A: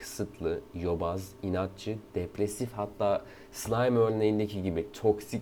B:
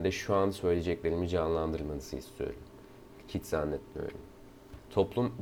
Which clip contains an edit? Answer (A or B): B